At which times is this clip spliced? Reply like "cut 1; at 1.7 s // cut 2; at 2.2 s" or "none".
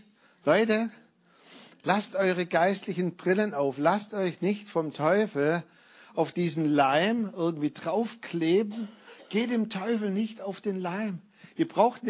none